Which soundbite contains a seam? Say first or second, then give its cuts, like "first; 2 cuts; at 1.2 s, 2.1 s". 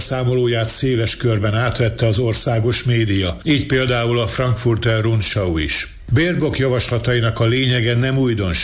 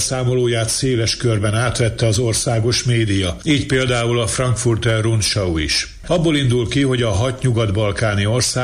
second; 1 cut; at 6.0 s